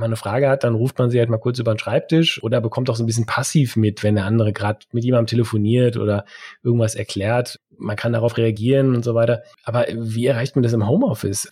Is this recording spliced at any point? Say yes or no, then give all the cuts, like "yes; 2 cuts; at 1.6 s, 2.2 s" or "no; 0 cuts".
no; 0 cuts